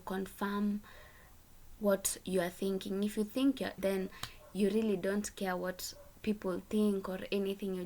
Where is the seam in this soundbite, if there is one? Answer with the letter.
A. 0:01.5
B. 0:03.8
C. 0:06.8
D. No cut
B